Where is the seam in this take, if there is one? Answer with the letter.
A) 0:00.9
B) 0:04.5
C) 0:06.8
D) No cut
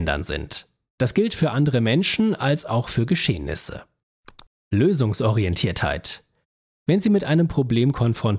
D